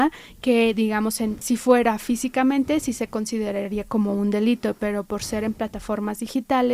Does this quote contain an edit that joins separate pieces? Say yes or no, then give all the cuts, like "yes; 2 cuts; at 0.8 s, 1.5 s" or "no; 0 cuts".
yes; 1 cut; at 1.4 s